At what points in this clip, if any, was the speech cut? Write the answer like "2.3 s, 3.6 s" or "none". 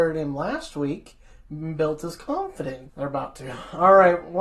2.9 s